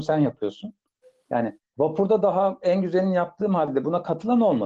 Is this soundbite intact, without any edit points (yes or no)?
yes